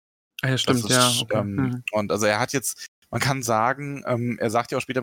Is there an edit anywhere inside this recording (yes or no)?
no